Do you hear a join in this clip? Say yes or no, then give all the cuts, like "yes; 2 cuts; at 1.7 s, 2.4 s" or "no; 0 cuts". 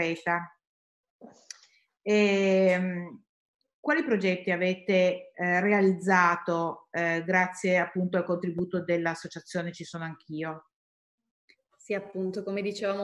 no; 0 cuts